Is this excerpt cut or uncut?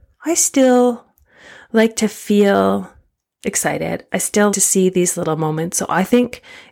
cut